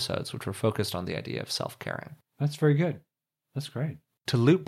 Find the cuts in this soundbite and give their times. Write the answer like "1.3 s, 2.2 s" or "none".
none